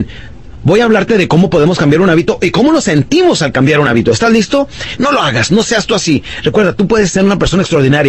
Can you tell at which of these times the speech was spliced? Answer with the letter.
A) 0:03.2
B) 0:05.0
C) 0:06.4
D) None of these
B